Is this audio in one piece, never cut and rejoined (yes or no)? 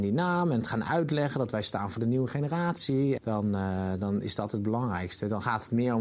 no